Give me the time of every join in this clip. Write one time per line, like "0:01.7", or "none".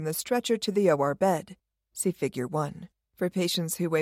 0:03.0